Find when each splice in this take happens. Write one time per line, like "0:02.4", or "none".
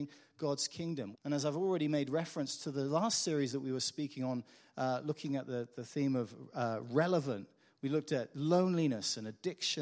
0:01.1